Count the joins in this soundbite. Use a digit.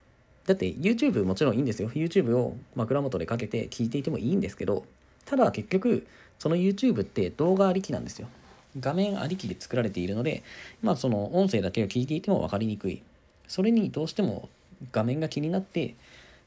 1